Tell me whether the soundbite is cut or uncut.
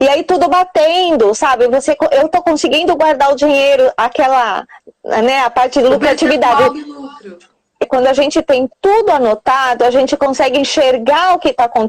cut